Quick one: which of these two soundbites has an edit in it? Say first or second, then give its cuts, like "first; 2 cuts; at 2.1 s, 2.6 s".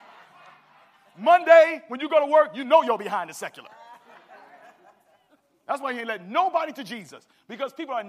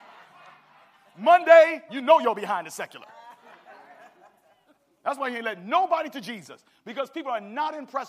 second; 1 cut; at 1.9 s